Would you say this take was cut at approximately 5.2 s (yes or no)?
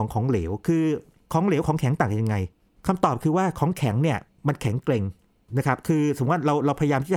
no